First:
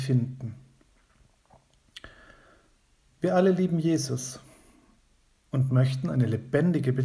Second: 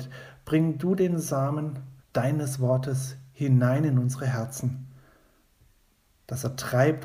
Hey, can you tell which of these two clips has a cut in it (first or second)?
second